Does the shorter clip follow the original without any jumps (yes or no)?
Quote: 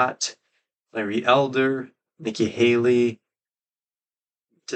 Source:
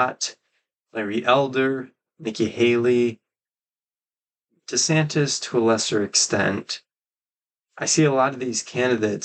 yes